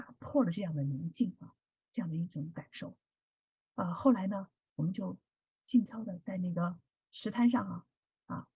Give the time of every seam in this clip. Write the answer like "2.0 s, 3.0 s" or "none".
5.9 s